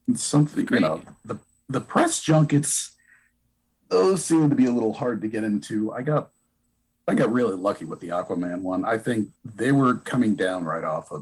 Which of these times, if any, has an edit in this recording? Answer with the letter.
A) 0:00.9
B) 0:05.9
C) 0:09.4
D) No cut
C